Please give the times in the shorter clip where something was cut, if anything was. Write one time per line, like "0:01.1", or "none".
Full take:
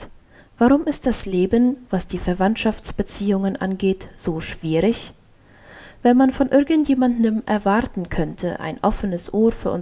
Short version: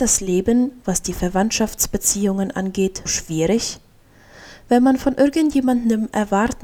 0:03.1

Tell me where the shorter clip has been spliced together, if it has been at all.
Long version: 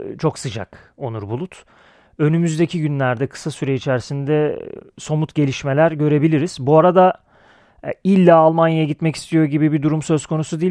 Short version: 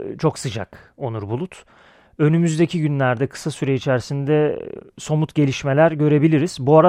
none

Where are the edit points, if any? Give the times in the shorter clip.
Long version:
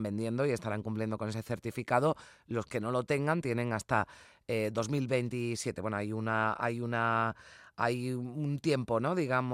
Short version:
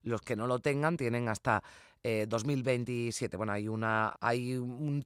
0:04.1

